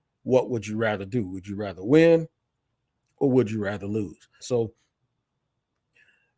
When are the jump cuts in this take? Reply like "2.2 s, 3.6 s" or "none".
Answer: 4.4 s